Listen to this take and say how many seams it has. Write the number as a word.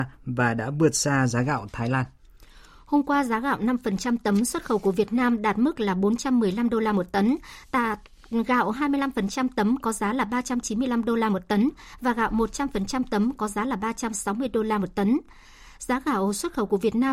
zero